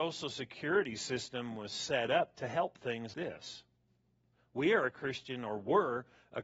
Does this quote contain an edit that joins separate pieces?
yes; 1 cut; at 3.1 s

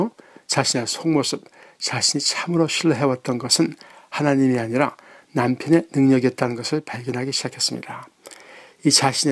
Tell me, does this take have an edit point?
no; 0 cuts

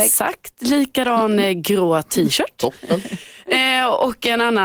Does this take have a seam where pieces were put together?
no; 0 cuts

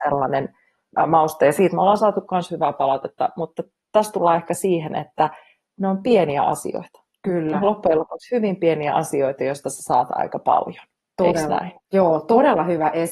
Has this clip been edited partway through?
no; 0 cuts

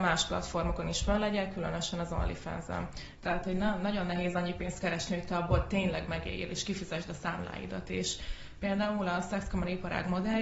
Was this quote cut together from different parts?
yes; 1 cut; at 3.1 s

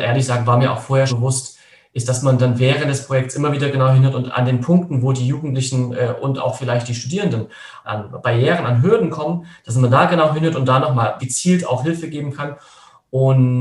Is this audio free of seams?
no; 3 cuts; at 1.1 s, 7.8 s, 11.2 s

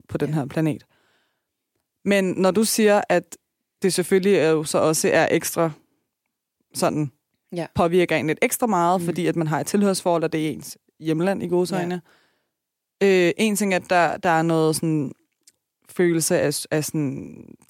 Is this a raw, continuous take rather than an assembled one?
yes; 0 cuts

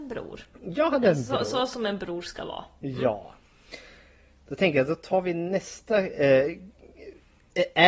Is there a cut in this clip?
no; 0 cuts

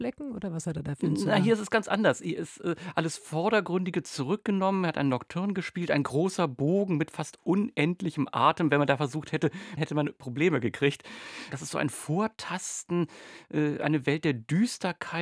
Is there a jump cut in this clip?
yes; 2 cuts; at 9.8 s, 11.5 s

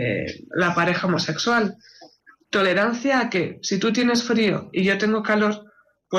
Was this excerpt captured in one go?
no; 1 cut; at 2.4 s

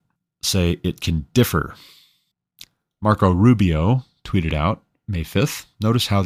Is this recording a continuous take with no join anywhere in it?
yes; 0 cuts

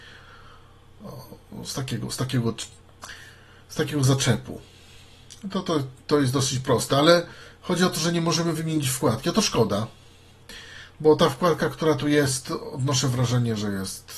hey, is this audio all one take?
yes; 0 cuts

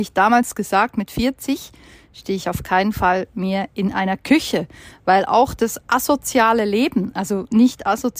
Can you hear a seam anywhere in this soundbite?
no; 0 cuts

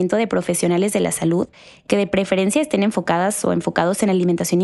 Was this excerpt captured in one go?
yes; 0 cuts

